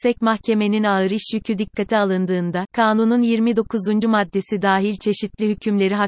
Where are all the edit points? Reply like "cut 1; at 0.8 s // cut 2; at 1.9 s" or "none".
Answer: none